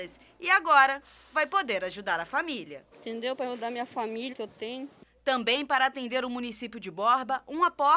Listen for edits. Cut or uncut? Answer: cut